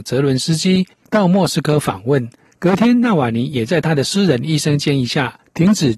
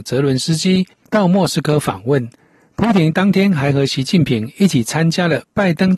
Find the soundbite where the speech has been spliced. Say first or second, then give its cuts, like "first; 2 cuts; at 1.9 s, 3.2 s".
first; 1 cut; at 2.5 s